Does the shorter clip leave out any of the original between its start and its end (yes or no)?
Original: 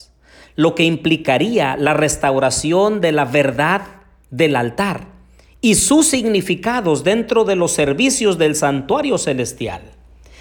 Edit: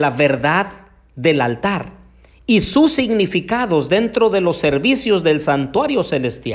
no